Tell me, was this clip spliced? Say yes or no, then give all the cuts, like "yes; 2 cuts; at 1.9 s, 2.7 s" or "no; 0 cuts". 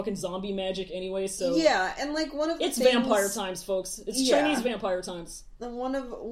no; 0 cuts